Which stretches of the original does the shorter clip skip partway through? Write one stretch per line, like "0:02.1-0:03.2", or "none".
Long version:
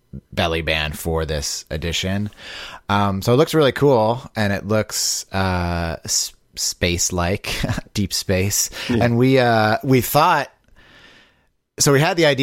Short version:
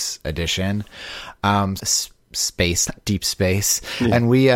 0:03.2-0:06.0
0:07.1-0:07.8